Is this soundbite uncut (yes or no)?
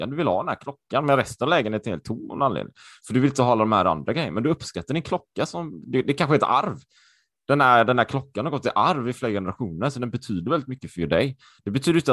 yes